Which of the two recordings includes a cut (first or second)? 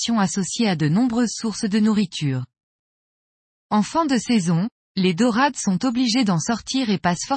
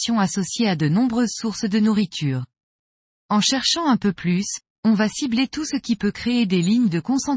second